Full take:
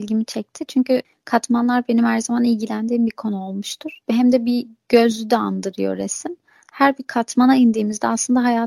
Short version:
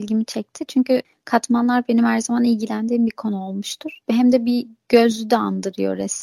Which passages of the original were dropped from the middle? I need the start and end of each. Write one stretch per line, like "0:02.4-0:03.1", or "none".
none

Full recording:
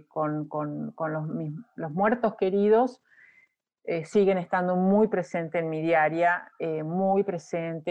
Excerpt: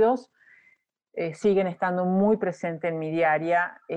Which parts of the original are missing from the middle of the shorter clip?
none

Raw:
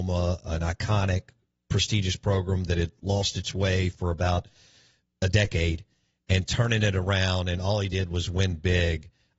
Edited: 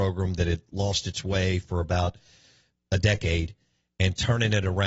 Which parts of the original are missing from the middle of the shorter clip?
none

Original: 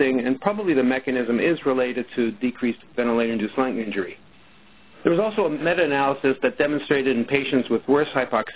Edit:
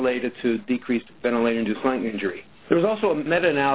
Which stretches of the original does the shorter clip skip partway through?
0:04.3-0:04.9

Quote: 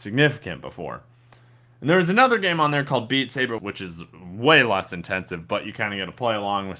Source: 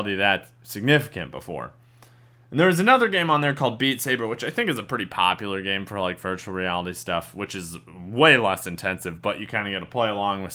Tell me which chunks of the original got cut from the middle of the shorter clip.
0:04.3-0:07.3

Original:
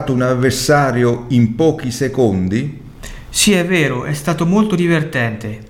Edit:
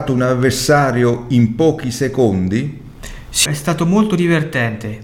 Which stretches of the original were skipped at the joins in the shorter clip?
0:03.4-0:04.0

